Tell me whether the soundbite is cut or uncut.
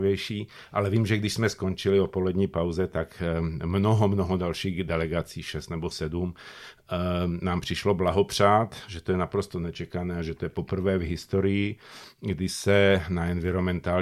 uncut